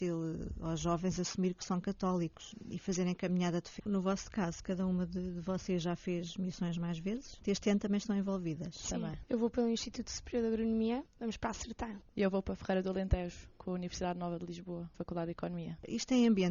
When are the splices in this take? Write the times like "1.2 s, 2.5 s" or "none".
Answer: 3.8 s